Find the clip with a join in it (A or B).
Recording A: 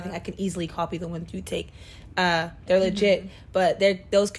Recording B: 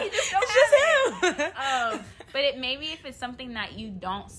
A